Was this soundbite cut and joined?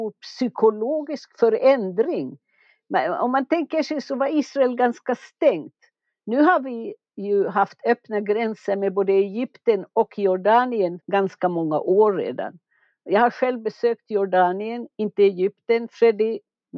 no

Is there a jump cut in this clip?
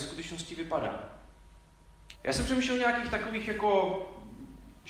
yes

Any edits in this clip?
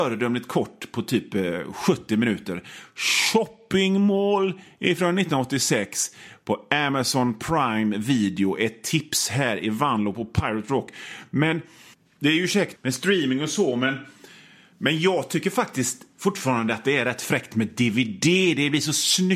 yes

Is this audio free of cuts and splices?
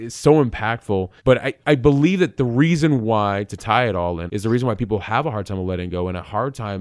no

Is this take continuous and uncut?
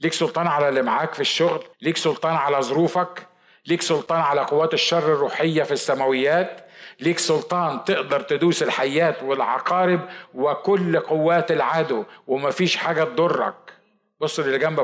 no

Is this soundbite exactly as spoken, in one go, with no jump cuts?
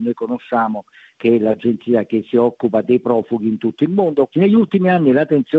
no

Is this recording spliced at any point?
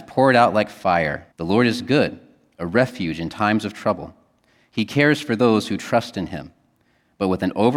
yes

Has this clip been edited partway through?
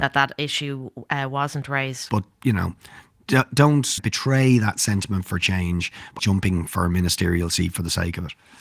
yes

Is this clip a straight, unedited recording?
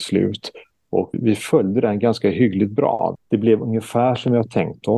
no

